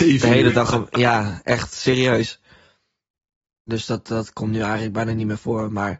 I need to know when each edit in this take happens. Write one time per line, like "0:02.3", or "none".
0:03.7